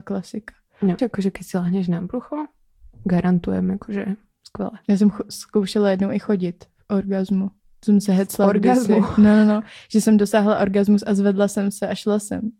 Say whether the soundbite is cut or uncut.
cut